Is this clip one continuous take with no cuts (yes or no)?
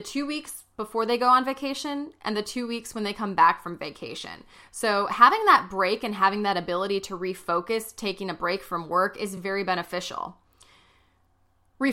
yes